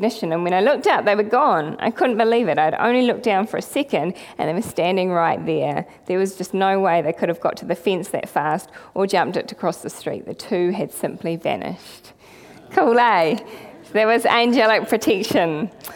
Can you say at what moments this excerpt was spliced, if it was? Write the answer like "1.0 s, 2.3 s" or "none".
none